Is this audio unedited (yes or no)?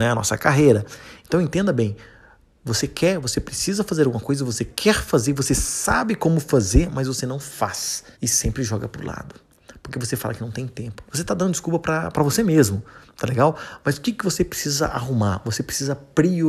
no